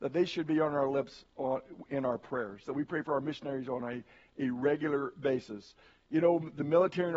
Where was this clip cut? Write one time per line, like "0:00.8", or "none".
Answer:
none